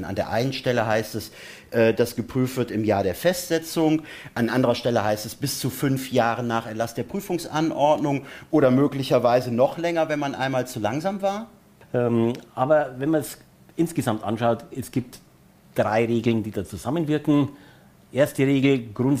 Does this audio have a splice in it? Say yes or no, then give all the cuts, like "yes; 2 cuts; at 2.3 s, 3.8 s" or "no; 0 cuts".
yes; 1 cut; at 11.8 s